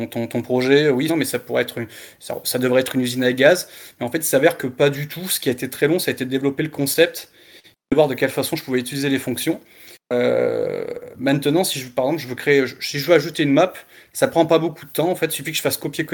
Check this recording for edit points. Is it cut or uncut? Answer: cut